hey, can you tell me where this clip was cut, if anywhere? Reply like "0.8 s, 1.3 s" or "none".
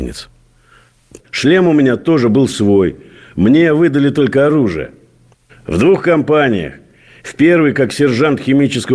1.2 s, 5.5 s